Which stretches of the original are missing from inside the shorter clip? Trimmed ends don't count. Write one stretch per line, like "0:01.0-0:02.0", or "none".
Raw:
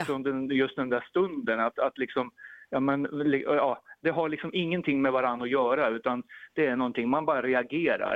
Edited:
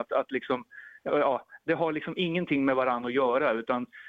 0:02.7-0:03.4